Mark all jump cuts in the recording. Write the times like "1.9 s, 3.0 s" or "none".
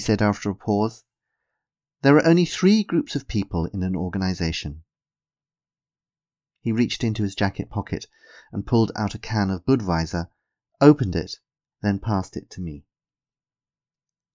11.7 s